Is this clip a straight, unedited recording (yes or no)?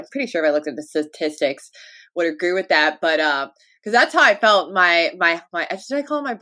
yes